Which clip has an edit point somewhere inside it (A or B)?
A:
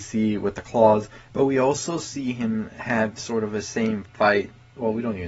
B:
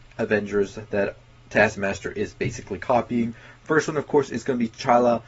A